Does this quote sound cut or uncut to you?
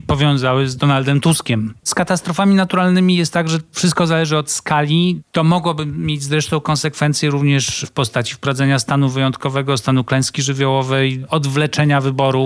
cut